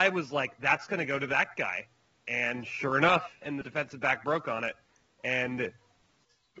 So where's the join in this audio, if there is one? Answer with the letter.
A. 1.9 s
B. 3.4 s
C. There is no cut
B